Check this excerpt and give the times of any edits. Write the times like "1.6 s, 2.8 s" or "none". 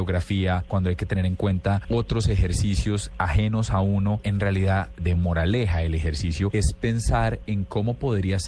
5.0 s

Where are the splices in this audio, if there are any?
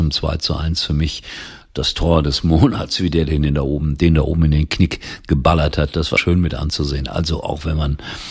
6.2 s

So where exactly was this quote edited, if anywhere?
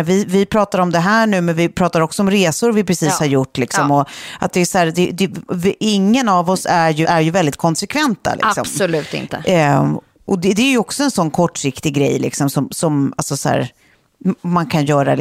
7.0 s

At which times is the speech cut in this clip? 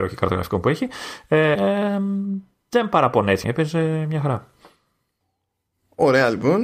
1.5 s, 3.4 s

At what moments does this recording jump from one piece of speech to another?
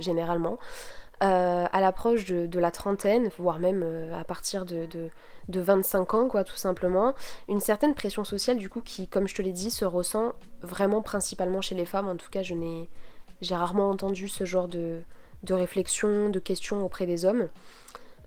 none

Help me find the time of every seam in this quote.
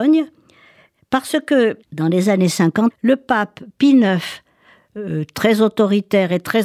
1.8 s, 2.9 s

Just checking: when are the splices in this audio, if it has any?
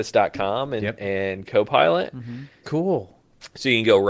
2.6 s

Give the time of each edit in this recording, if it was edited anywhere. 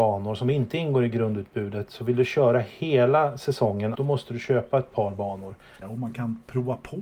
3.9 s, 5.8 s

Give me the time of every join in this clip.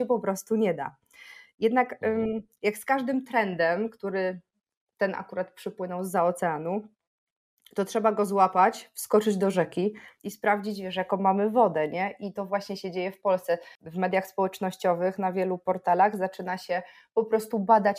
none

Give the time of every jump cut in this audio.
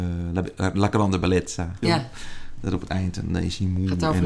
1.8 s

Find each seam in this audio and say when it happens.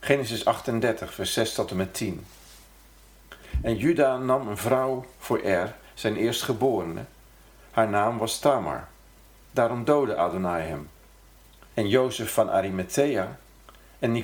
9.4 s, 11.7 s

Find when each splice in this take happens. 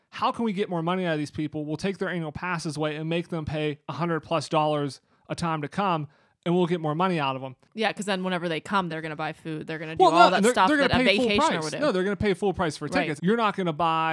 8.9 s, 13.2 s

